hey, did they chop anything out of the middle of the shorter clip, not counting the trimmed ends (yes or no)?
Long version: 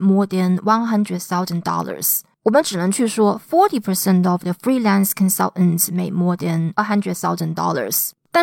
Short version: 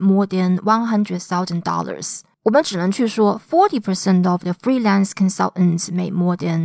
no